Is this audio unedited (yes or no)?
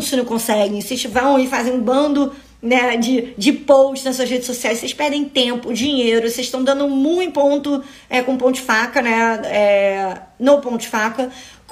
yes